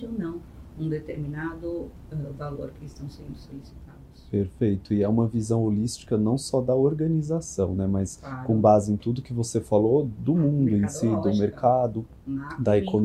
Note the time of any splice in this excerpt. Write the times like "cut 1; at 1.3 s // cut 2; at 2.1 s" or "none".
none